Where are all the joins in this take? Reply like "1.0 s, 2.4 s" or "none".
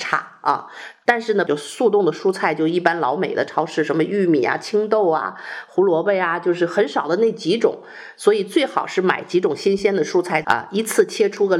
1.5 s, 10.4 s